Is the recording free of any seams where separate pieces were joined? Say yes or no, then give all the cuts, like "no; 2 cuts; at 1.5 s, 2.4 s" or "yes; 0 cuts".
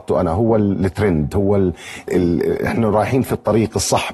no; 1 cut; at 2.1 s